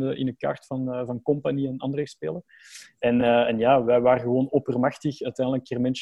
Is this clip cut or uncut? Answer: uncut